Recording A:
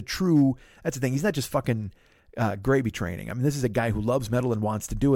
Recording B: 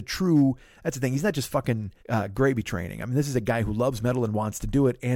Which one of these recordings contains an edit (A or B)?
B